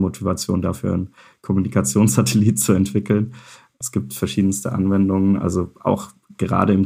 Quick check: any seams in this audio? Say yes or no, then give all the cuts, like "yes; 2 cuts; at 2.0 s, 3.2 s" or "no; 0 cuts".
yes; 1 cut; at 3.8 s